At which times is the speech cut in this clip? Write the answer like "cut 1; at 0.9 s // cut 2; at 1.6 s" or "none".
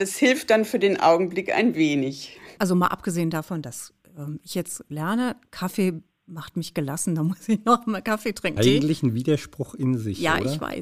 cut 1; at 2.6 s // cut 2; at 8.6 s